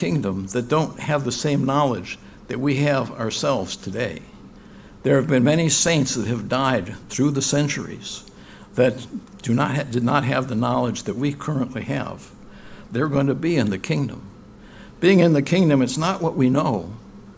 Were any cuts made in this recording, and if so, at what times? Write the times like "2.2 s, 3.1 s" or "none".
12.9 s